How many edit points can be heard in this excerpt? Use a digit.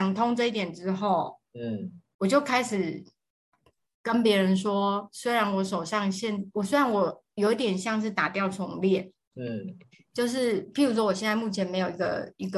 2